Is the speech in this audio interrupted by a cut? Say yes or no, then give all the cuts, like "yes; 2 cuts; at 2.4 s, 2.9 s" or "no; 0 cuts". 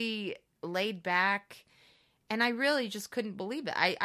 no; 0 cuts